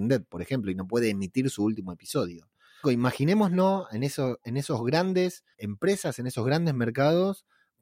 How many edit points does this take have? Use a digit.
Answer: 2